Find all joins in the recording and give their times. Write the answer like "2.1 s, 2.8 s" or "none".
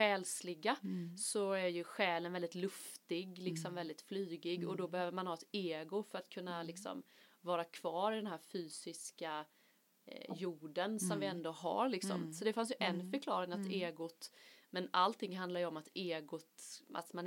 none